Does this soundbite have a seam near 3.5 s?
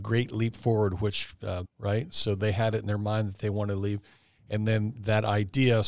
no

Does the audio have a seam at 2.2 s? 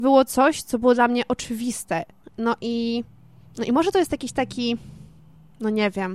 yes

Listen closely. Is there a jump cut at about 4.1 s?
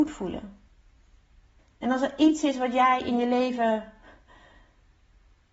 no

